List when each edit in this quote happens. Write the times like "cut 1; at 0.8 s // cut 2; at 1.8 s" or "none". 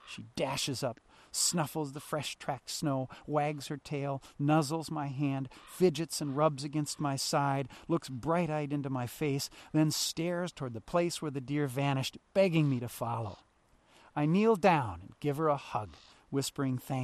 none